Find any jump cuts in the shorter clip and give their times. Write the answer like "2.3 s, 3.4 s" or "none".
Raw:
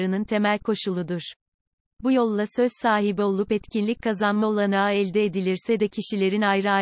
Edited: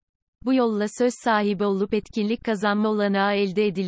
none